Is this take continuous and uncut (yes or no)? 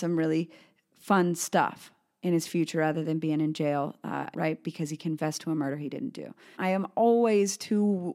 no